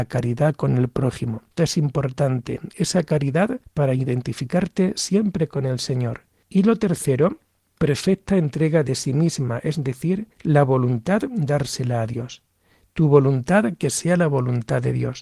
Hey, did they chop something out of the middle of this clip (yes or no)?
yes